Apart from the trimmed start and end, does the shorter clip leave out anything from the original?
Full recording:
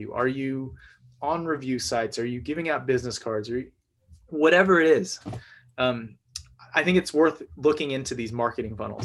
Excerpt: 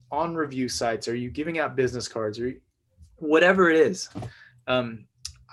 no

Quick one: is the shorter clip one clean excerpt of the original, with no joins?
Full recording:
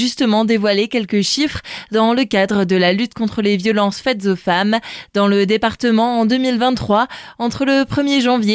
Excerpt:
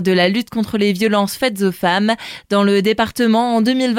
yes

